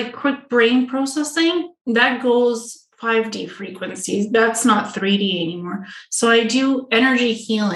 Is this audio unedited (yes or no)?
yes